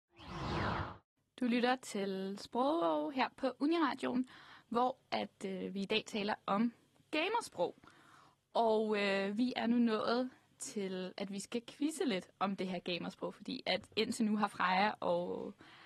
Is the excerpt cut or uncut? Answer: uncut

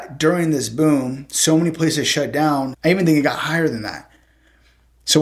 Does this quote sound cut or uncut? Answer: cut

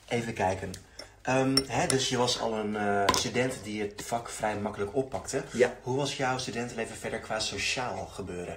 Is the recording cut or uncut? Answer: uncut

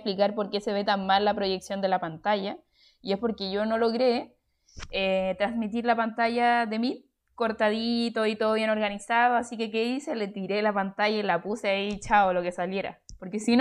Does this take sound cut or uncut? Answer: uncut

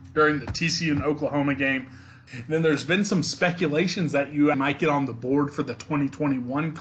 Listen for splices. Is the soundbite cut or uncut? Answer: cut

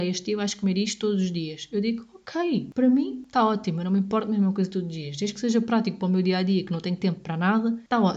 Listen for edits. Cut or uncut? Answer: uncut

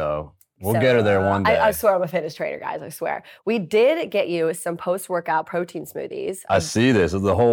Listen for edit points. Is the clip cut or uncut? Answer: uncut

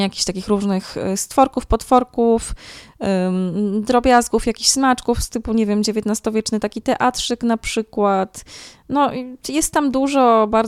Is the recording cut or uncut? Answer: uncut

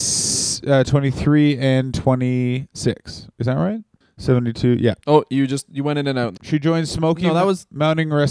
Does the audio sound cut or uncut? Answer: cut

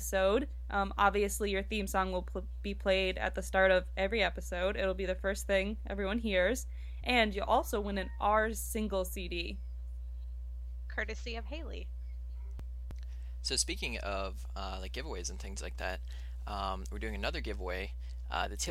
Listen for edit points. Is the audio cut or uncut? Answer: uncut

